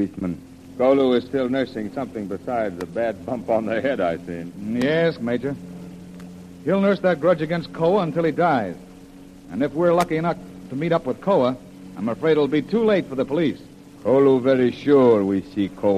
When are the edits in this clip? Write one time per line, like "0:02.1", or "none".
0:05.2